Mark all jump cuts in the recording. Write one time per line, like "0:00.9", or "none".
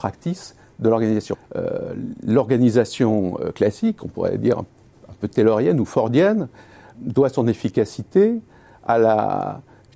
0:01.3
0:06.9